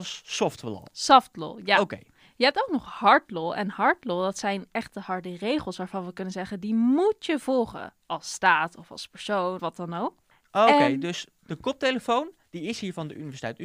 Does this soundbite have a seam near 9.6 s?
yes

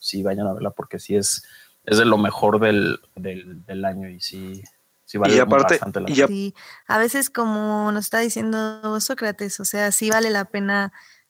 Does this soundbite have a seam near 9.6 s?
no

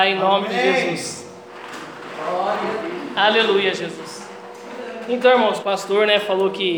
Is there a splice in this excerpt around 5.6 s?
yes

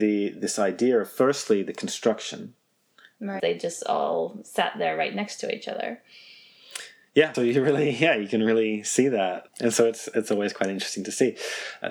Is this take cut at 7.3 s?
yes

